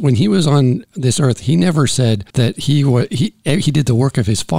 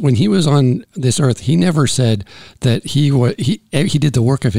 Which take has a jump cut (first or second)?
first